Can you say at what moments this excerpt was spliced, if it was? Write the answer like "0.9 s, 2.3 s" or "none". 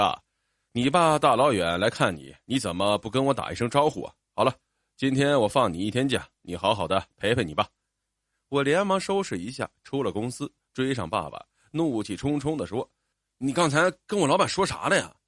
none